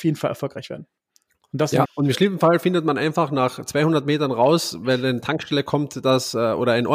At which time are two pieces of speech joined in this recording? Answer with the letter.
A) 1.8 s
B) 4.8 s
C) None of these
A